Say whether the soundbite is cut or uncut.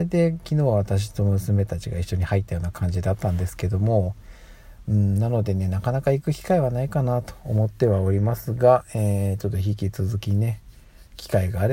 uncut